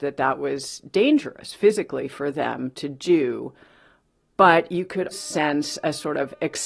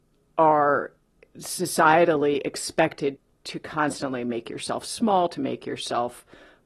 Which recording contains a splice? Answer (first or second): first